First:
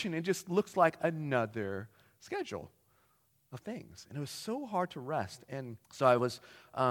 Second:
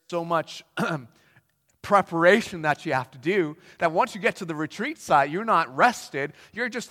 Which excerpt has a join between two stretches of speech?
first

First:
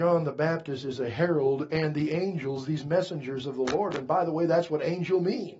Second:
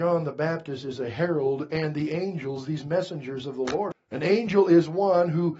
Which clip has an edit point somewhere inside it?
second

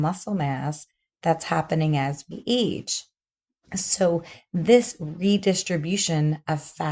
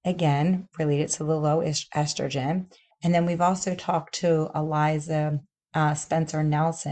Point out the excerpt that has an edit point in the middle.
second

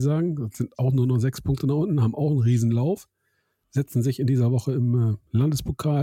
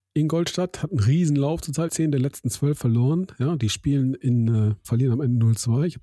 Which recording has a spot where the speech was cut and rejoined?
second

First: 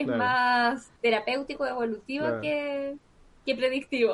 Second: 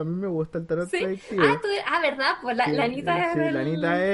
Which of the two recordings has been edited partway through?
first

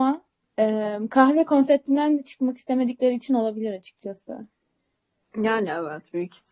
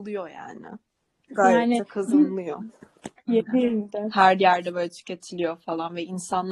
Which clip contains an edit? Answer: second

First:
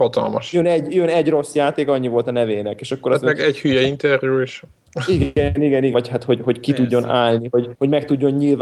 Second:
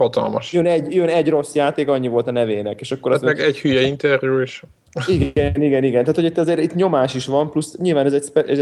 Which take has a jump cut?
first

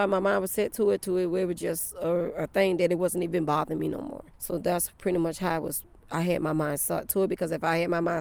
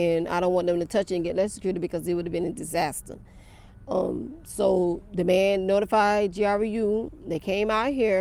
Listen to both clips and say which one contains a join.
first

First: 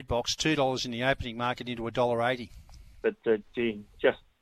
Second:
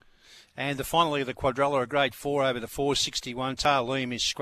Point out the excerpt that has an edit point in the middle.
first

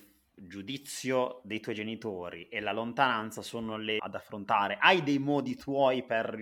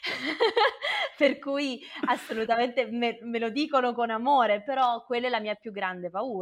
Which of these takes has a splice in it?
first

